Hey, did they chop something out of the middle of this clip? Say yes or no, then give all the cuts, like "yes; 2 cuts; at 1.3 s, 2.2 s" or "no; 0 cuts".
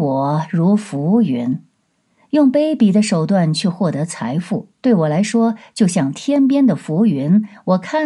no; 0 cuts